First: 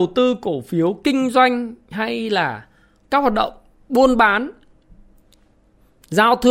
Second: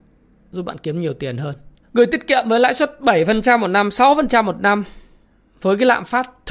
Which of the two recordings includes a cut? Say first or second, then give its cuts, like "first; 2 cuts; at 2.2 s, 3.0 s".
second; 1 cut; at 1.8 s